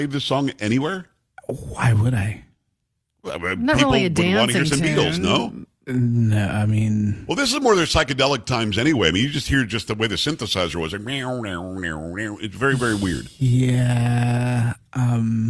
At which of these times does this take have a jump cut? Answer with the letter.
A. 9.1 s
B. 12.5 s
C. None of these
C